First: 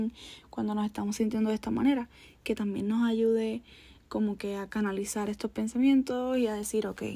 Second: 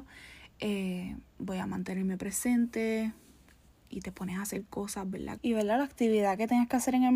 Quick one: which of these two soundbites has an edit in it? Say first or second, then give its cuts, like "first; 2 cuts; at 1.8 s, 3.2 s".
second; 2 cuts; at 1.3 s, 5.4 s